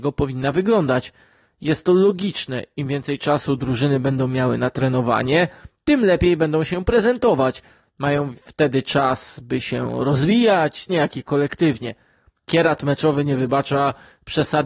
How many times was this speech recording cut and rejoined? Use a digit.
2